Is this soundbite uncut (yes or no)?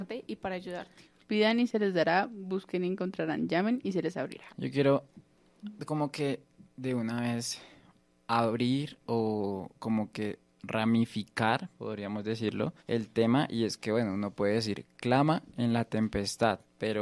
no